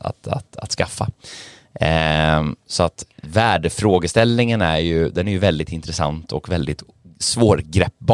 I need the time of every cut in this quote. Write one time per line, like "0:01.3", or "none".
none